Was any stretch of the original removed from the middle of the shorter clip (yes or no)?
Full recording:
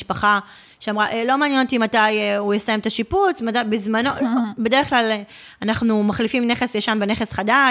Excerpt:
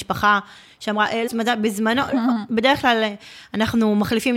yes